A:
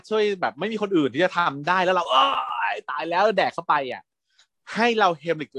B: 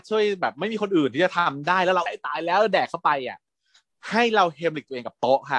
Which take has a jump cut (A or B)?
B